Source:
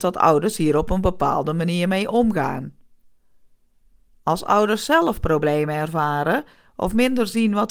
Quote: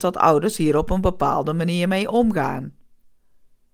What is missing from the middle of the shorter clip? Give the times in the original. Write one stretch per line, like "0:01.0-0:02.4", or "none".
none

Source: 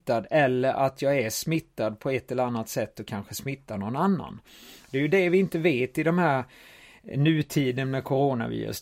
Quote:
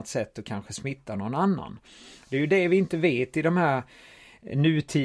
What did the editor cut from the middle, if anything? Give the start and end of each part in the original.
none

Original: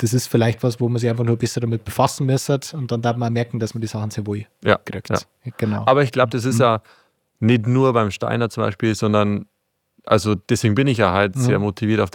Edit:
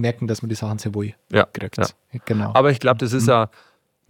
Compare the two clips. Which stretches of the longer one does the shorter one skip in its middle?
none

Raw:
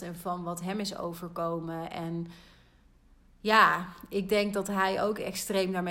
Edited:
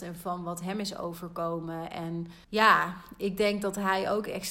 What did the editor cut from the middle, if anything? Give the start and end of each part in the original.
0:02.4-0:03.4

